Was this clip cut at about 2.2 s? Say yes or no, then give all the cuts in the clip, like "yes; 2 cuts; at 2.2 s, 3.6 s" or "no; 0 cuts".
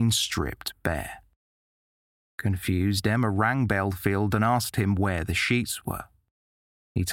no; 0 cuts